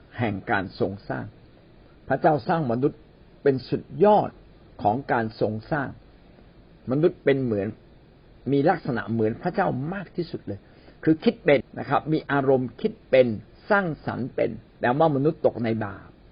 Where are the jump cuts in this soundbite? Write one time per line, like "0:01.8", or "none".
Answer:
0:11.6
0:14.7